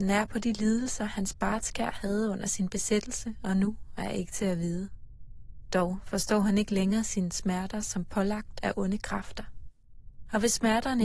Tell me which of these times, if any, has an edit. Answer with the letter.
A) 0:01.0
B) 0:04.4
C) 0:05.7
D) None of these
D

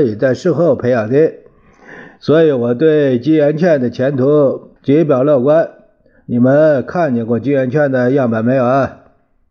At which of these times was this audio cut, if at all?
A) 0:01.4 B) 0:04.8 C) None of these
B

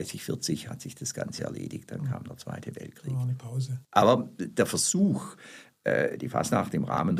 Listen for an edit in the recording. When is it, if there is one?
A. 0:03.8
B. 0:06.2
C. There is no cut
A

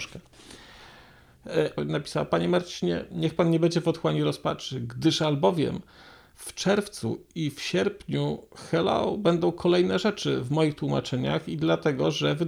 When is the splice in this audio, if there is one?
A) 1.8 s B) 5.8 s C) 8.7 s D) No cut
A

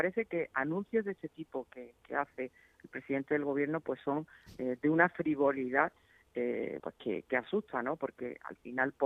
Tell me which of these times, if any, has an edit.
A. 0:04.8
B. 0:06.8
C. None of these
B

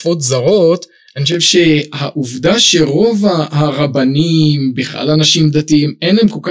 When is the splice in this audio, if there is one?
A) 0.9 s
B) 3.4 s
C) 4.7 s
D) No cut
D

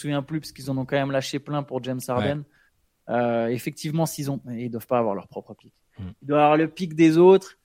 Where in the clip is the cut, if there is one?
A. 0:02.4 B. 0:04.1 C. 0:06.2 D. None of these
D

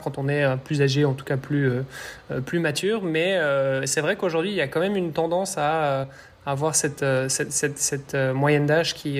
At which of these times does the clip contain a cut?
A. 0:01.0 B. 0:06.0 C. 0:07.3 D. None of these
D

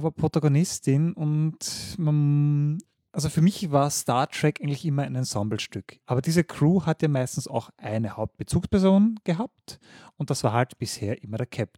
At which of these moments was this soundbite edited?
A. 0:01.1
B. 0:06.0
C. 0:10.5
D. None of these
B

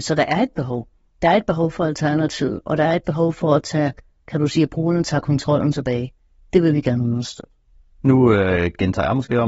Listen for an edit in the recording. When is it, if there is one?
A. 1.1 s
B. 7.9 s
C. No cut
B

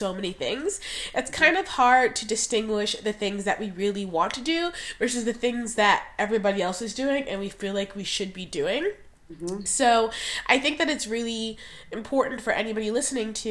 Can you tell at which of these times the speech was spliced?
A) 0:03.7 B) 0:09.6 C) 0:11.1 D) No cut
D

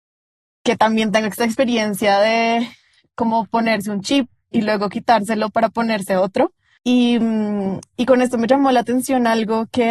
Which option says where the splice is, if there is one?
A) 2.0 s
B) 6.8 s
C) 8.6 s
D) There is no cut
B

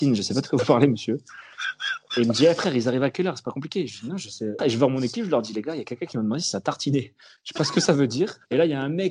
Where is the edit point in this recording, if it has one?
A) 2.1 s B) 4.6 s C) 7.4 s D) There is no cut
B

